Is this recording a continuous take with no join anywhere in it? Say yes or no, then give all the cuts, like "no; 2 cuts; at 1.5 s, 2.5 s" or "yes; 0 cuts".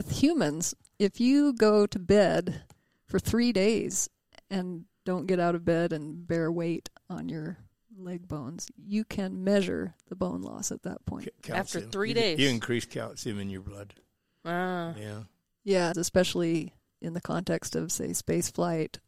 no; 1 cut; at 15.9 s